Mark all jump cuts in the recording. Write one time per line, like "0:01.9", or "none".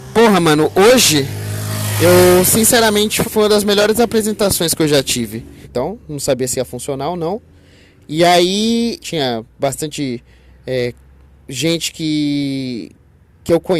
0:03.2
0:05.6
0:09.0

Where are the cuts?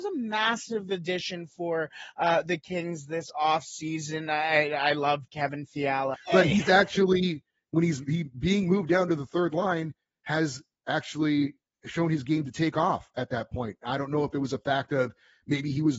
0:06.1

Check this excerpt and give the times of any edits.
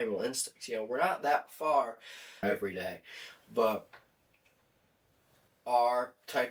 0:02.4

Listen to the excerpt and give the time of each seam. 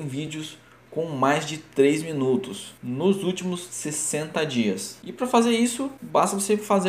none

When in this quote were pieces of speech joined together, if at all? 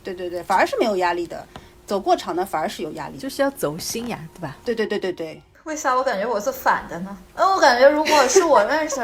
none

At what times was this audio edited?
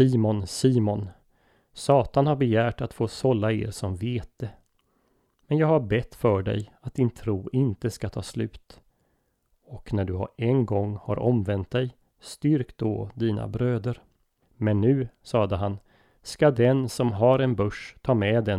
0:14.4

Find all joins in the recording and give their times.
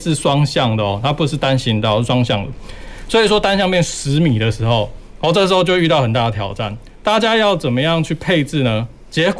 none

